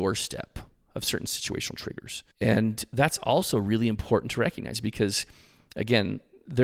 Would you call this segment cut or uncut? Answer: cut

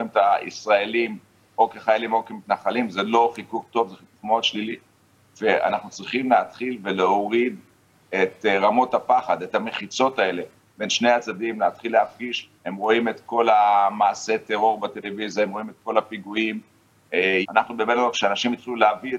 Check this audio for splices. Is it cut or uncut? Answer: cut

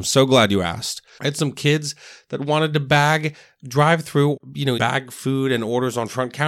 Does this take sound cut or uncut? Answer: cut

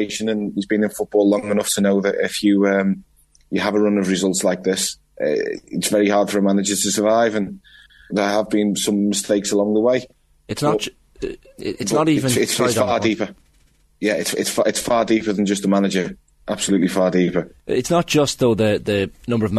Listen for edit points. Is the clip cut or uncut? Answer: cut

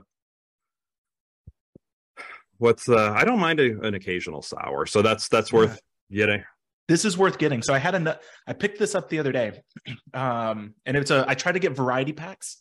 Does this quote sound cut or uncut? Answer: uncut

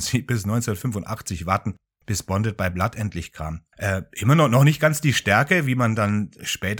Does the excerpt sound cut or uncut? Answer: cut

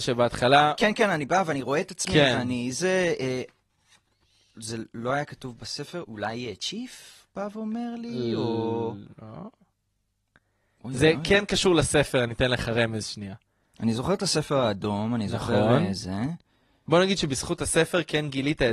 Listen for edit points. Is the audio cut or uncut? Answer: cut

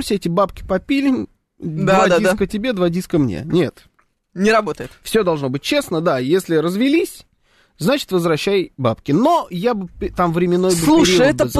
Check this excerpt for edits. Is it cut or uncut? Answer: uncut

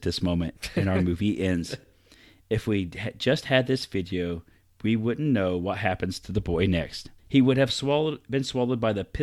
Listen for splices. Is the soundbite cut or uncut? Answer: cut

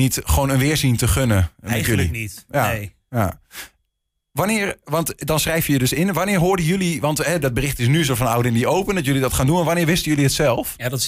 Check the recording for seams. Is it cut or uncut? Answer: uncut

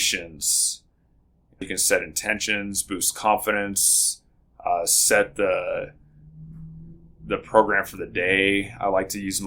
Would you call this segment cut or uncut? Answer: cut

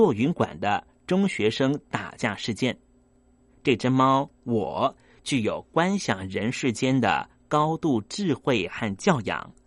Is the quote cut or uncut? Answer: cut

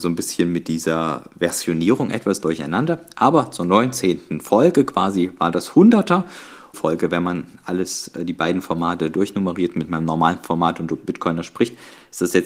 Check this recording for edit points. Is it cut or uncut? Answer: cut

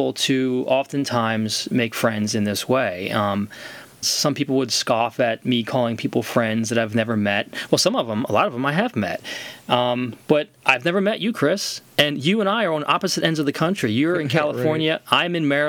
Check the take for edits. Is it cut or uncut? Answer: cut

